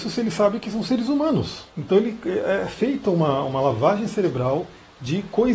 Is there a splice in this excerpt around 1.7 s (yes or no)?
yes